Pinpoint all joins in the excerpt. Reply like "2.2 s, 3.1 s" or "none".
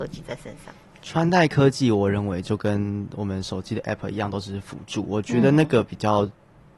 none